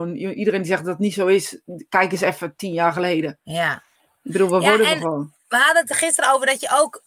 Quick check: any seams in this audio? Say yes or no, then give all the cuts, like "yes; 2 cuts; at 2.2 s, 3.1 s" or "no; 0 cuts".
no; 0 cuts